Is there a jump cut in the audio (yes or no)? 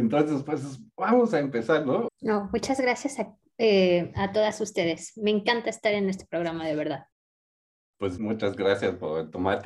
yes